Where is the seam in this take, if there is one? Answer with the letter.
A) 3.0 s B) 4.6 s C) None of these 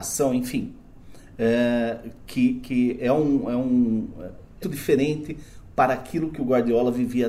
B